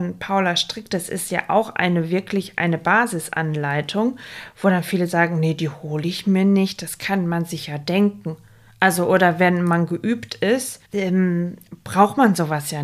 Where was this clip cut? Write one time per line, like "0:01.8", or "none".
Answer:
0:10.8